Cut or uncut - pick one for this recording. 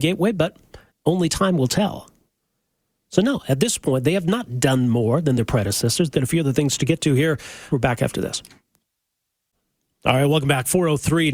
cut